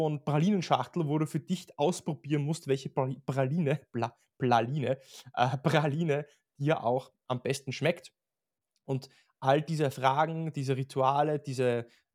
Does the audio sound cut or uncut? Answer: uncut